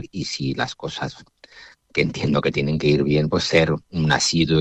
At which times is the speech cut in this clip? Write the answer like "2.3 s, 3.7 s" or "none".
none